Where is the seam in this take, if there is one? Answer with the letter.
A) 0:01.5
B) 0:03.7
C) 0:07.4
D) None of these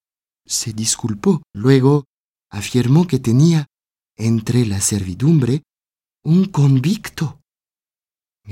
A